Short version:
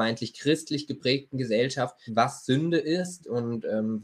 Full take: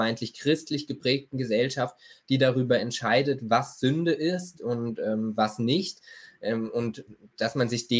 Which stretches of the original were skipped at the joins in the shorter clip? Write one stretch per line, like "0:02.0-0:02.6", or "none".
0:02.1-0:03.4